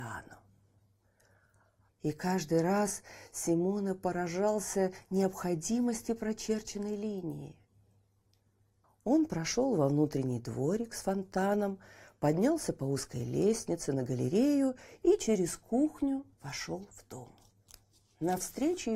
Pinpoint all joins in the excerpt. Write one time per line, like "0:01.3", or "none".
0:01.9
0:08.8
0:16.3